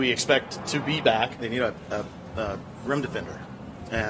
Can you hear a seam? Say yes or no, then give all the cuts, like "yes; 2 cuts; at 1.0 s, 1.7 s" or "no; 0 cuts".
yes; 1 cut; at 1.4 s